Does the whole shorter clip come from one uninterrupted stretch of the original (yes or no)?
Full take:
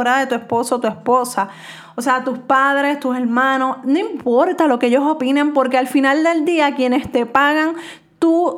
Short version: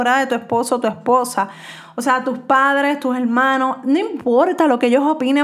yes